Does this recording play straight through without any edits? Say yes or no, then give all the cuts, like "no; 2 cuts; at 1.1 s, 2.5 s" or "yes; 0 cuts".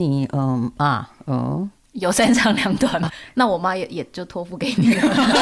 no; 1 cut; at 3.1 s